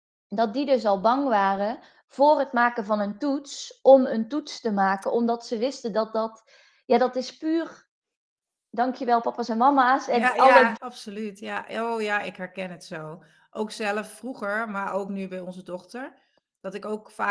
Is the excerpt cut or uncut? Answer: cut